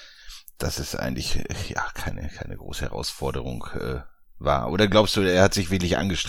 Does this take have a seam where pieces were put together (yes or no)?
no